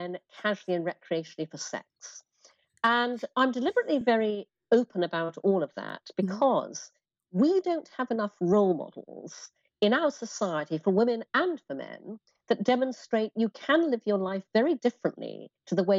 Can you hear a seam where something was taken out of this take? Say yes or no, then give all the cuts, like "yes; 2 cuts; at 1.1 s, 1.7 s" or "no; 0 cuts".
no; 0 cuts